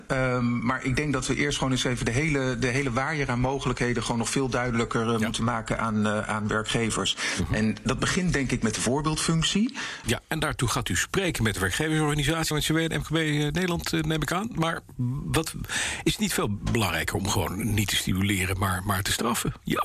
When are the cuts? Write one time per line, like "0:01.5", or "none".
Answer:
0:10.0
0:12.5